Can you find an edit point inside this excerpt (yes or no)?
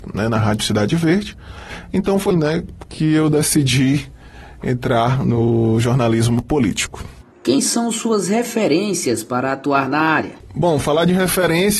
yes